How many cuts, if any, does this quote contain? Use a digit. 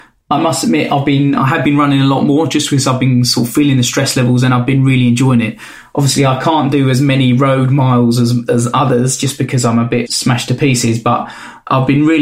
2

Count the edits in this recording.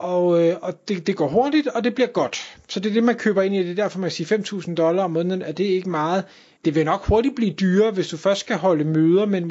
1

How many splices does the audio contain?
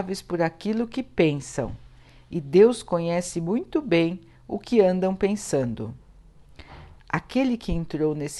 1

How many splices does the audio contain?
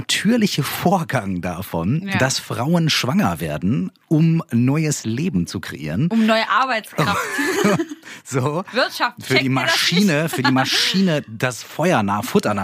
0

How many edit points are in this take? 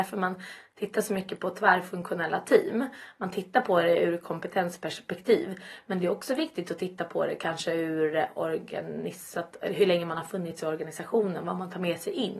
0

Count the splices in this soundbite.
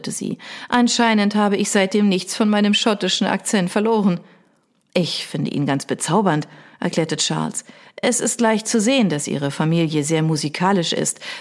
0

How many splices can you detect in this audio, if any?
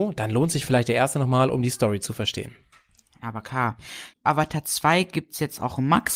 1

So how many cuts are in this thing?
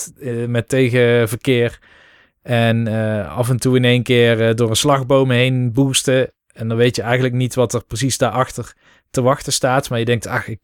0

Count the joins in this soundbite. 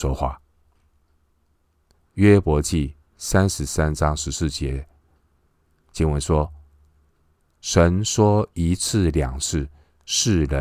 1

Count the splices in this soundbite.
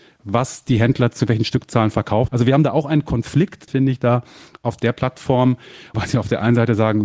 3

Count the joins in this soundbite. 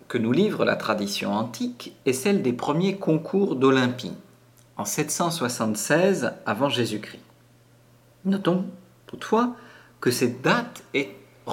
0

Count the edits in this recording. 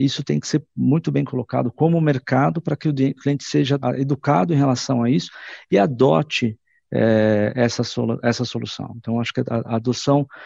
1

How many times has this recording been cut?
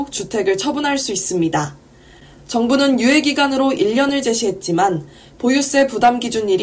1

